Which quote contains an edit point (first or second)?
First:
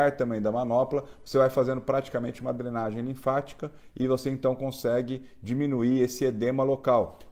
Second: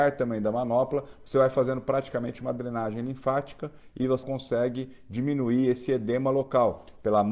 second